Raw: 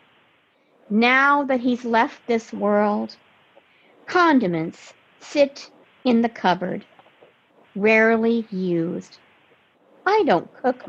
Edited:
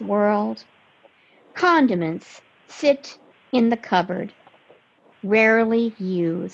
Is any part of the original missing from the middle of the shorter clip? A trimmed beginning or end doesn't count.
no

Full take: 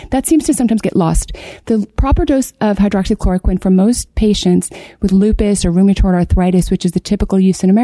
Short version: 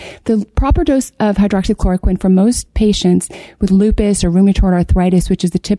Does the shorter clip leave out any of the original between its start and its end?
no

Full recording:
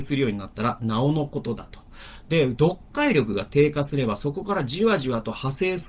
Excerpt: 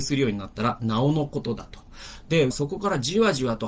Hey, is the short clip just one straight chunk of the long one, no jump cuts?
no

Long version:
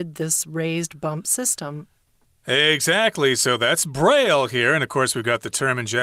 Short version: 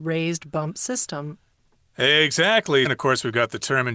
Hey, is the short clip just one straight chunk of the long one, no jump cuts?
no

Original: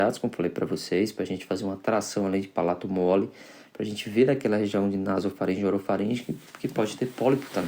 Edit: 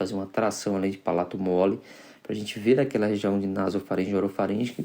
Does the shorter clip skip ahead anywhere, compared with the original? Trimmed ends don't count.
no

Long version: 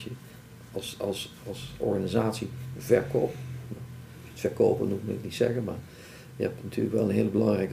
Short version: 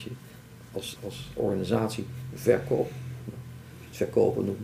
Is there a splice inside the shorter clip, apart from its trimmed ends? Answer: yes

